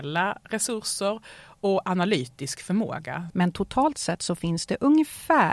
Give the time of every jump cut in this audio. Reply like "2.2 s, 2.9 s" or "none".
3.3 s